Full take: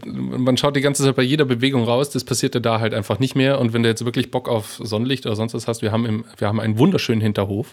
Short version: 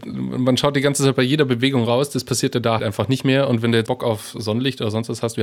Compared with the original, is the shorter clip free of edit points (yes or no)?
no